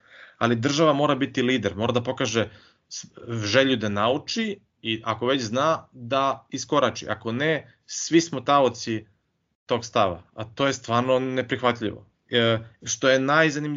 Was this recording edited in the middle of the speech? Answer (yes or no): yes